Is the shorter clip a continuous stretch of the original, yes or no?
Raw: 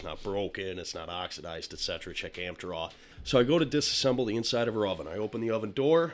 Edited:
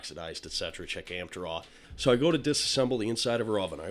yes